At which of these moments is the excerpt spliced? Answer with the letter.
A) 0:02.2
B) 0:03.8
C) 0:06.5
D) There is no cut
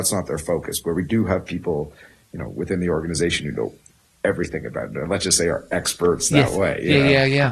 D